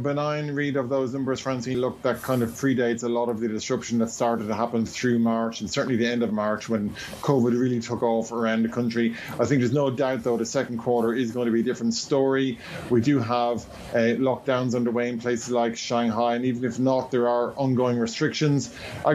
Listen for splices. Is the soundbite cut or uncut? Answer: cut